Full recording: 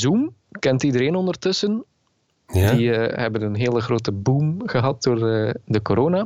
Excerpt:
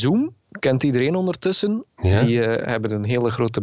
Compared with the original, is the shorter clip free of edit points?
no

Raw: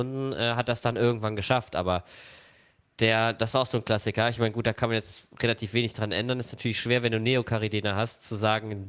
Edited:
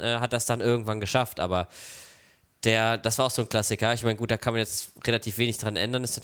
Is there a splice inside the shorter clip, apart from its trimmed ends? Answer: no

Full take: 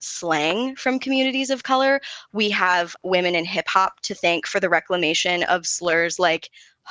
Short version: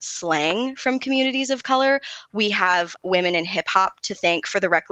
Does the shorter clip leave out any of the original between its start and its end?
no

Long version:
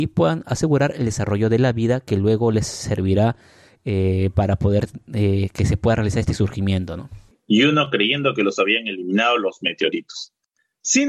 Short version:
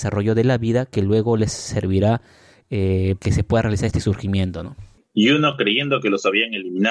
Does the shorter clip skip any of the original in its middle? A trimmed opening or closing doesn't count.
yes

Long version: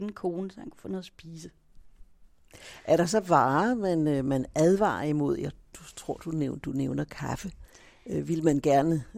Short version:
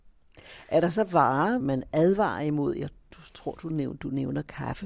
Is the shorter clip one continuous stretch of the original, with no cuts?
no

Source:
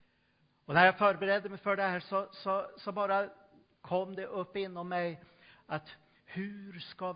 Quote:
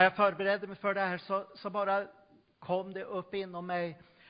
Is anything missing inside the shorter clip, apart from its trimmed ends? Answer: yes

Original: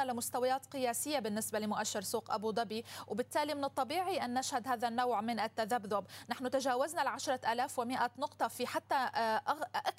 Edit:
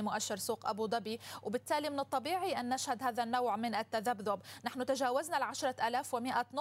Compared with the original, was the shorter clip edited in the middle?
no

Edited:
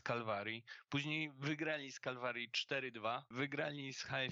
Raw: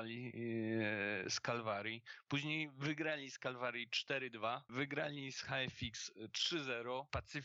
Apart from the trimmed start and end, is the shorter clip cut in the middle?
no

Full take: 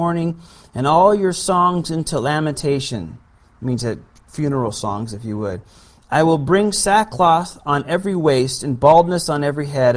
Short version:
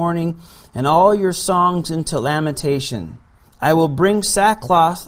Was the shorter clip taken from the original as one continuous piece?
no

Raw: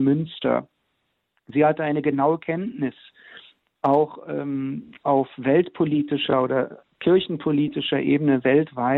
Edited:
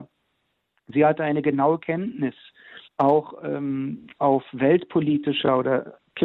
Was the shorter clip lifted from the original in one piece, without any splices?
no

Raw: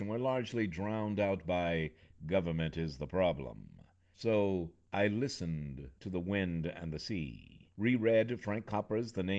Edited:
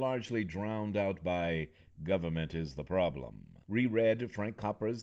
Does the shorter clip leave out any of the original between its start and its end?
yes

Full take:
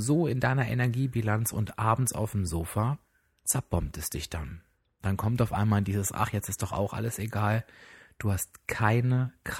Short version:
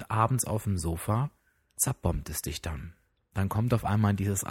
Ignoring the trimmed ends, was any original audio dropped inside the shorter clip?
no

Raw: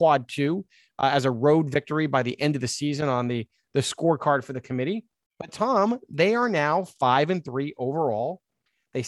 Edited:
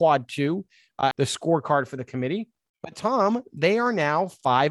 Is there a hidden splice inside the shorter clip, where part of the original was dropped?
yes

